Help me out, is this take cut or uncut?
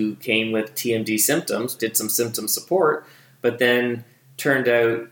cut